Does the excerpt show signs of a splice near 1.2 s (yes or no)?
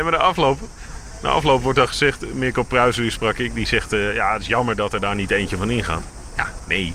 no